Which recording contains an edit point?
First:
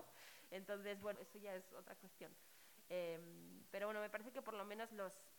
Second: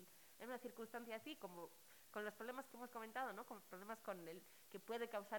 first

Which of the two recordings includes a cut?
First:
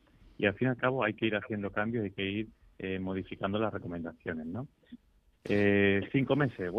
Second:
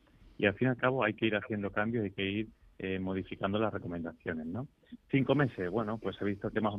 second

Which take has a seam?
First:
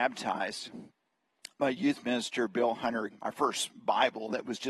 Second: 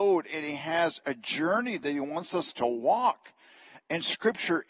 first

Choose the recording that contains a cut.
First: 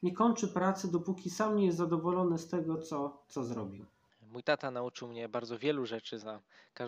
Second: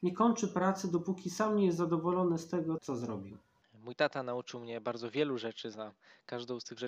second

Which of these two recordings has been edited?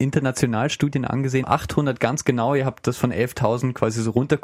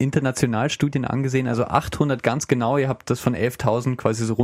first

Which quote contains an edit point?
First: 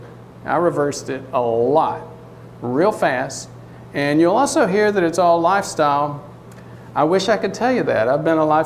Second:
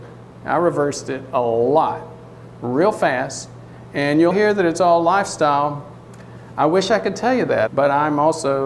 second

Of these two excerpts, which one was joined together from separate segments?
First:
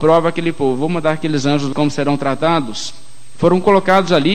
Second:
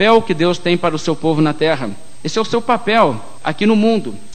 first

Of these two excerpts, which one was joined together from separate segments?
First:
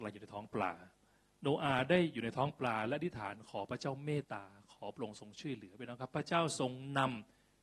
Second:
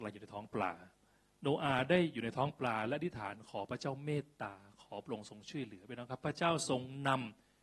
first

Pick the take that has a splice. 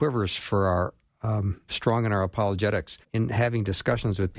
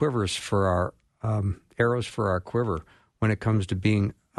first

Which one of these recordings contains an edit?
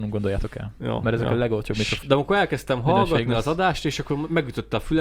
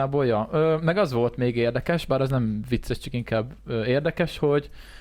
first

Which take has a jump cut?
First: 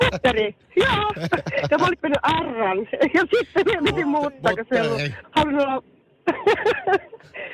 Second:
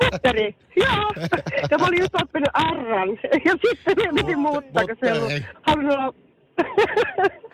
first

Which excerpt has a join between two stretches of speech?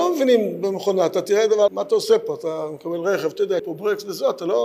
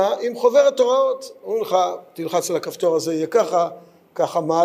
first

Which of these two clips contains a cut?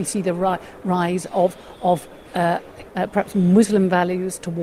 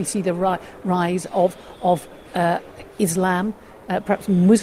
first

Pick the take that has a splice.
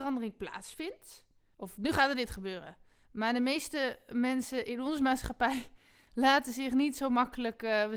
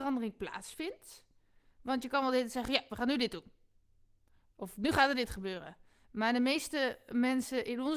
first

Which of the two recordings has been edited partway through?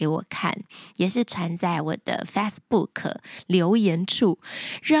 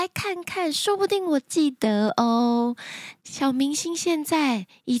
second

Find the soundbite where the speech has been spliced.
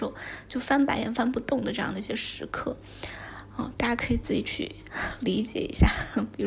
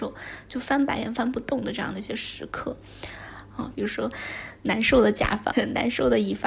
second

